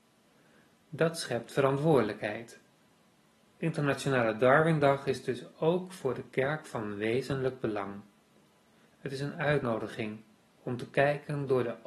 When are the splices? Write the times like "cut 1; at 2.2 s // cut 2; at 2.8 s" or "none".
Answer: none

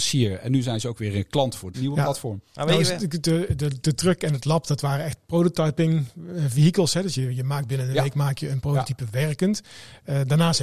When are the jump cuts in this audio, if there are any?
cut 1; at 1.7 s

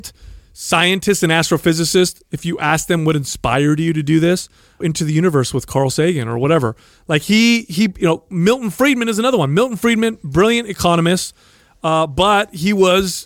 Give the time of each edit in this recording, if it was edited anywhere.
cut 1; at 4.8 s

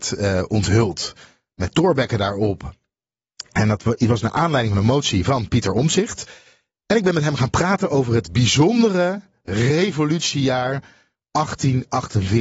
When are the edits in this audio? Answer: none

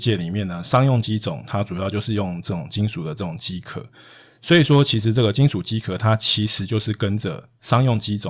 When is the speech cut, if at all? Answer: none

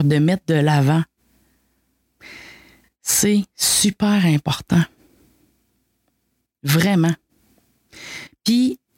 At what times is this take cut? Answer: none

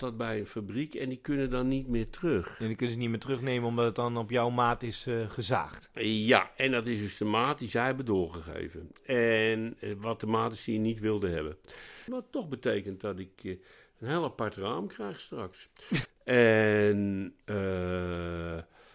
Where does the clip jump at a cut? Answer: cut 1; at 12.1 s // cut 2; at 16.1 s

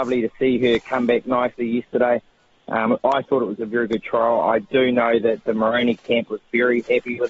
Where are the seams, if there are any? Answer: none

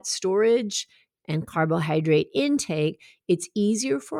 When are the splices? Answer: none

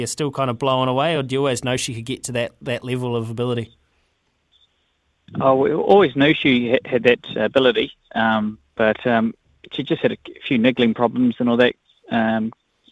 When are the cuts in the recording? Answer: none

